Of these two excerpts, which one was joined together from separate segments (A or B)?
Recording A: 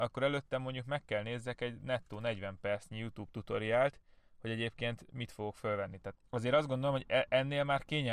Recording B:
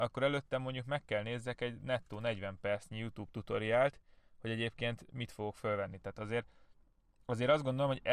A